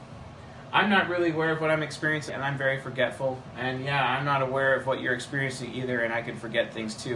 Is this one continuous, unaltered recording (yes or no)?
no